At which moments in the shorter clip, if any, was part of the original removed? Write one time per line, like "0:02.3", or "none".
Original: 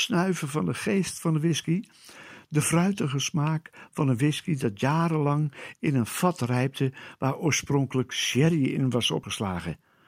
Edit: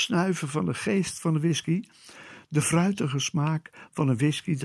none